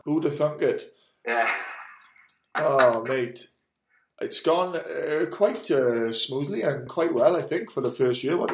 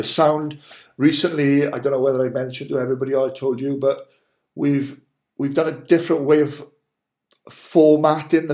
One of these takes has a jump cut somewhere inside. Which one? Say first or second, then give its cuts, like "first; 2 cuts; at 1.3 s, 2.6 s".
first; 1 cut; at 6.9 s